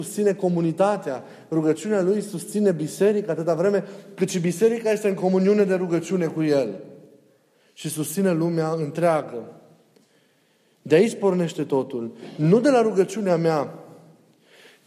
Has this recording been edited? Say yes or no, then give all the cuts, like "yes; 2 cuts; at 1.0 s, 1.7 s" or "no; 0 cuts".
no; 0 cuts